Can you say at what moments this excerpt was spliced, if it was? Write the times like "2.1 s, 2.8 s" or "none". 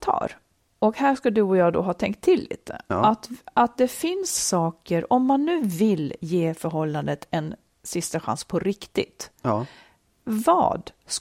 none